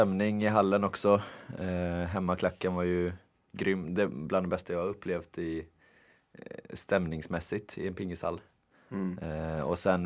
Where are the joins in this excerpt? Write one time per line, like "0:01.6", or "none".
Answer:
none